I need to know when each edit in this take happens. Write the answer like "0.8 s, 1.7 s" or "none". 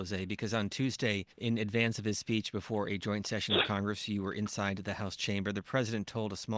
1.3 s

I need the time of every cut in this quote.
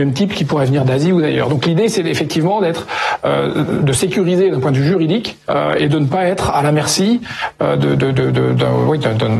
none

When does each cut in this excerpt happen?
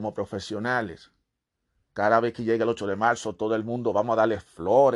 1.9 s

